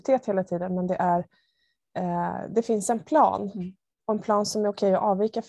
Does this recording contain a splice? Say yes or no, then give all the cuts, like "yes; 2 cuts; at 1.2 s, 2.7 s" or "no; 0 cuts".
no; 0 cuts